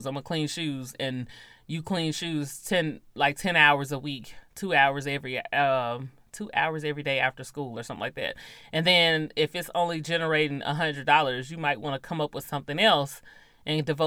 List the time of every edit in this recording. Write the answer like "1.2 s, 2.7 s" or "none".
3.0 s